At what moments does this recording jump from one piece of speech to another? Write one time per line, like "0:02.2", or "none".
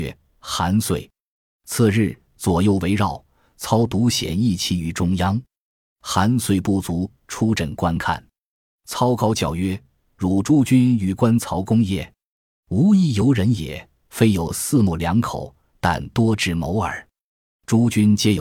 0:02.3
0:07.1